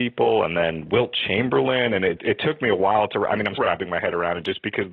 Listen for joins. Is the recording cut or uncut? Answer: cut